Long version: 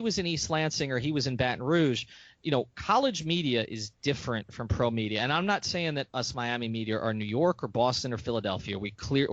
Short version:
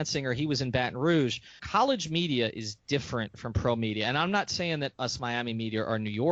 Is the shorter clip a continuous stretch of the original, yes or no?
no